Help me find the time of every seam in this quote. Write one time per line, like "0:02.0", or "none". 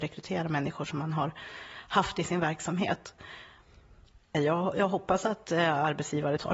0:04.3